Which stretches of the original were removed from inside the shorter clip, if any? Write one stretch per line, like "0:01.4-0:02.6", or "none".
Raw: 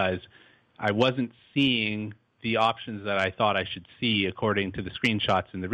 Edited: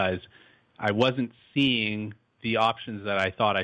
none